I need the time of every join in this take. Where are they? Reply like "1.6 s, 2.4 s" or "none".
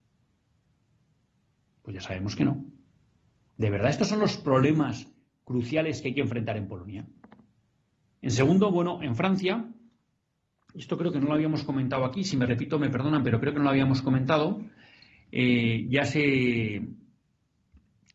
3.5 s, 8.1 s